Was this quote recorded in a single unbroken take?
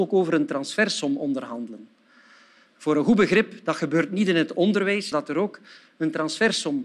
no; 1 cut; at 5.1 s

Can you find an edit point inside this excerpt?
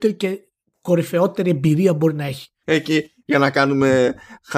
yes; 1 cut; at 2.6 s

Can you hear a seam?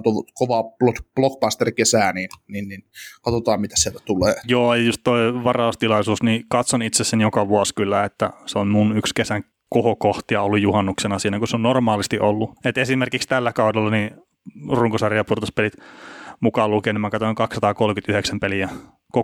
yes; 2 cuts; at 4.4 s, 12.6 s

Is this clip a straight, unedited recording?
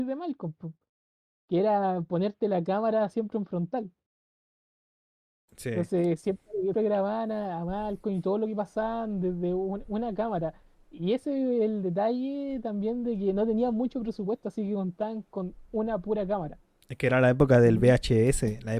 no; 1 cut; at 6.7 s

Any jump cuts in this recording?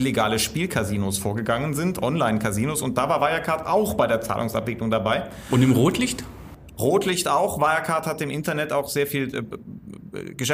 no; 0 cuts

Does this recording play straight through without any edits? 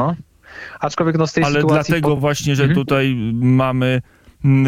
yes; 0 cuts

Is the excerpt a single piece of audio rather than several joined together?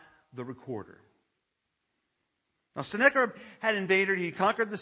yes; 0 cuts

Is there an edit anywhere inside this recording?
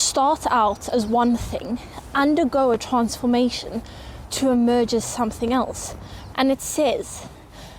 yes; 1 cut; at 6.3 s

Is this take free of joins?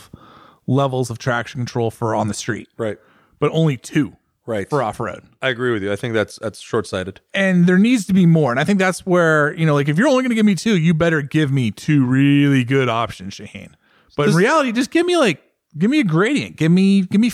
yes; 0 cuts

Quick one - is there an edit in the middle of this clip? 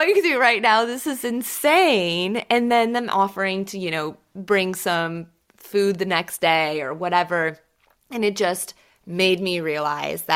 no; 0 cuts

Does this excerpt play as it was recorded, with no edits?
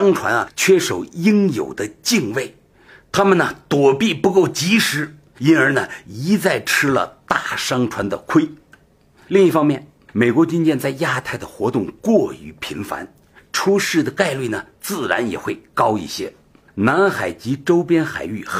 yes; 0 cuts

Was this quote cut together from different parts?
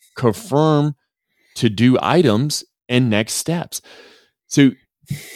no; 0 cuts

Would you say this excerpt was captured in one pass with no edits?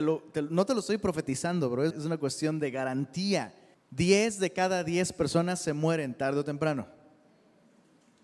no; 2 cuts; at 1.9 s, 3.7 s

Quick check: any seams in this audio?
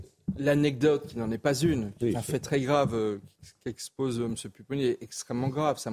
no; 0 cuts

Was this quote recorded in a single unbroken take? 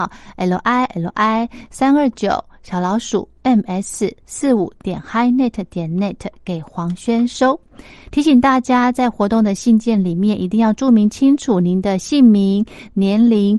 yes; 0 cuts

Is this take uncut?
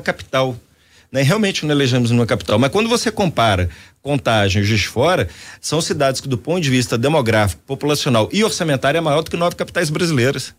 yes; 0 cuts

